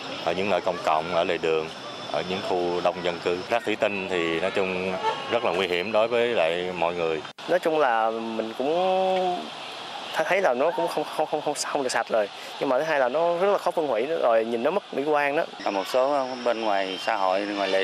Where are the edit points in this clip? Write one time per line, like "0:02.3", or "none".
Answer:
none